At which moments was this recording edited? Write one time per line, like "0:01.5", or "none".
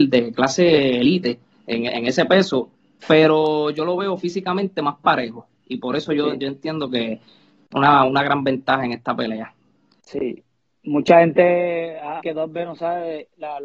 0:07.7
0:12.2